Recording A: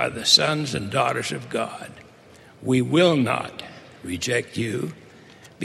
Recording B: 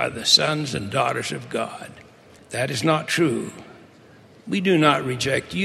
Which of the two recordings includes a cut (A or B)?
B